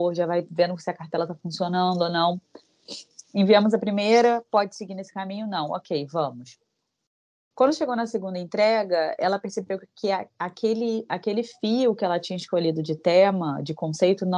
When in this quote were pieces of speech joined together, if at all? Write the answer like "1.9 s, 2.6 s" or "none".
7.5 s